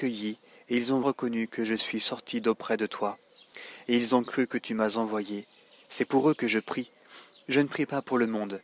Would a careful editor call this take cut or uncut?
cut